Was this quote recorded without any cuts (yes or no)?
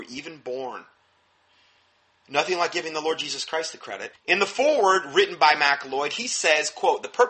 no